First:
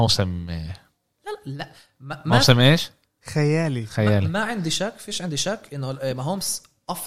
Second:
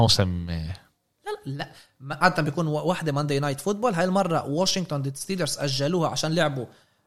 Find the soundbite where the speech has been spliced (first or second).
second